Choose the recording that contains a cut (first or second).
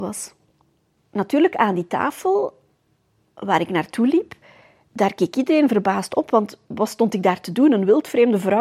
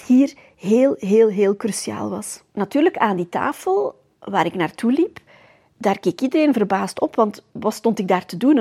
second